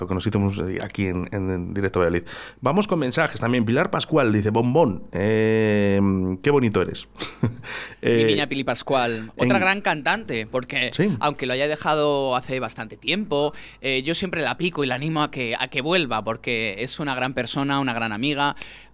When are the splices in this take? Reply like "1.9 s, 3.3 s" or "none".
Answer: none